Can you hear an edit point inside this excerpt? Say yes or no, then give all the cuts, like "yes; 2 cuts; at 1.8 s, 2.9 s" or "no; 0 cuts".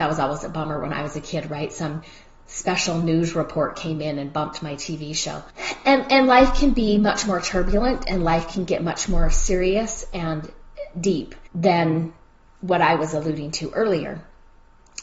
no; 0 cuts